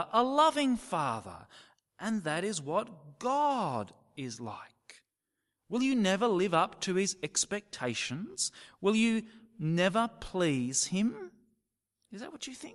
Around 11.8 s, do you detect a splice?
no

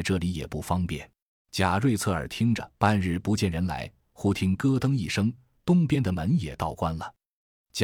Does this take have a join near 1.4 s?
yes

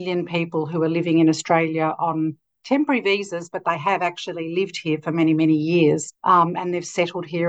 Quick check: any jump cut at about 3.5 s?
no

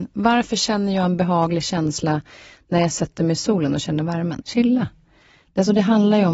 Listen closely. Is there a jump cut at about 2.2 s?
no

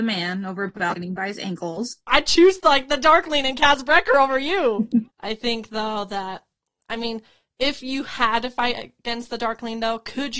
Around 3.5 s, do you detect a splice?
no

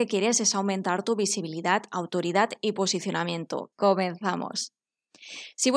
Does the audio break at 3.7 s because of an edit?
yes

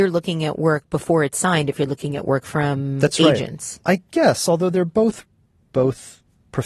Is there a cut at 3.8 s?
yes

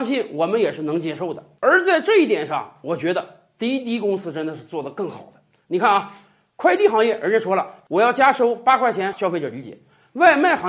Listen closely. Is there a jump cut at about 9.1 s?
yes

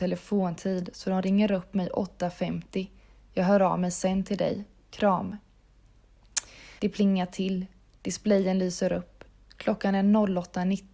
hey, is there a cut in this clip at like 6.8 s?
yes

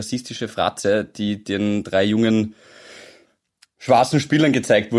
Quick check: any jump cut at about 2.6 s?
no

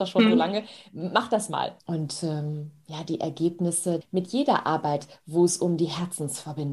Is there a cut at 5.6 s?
no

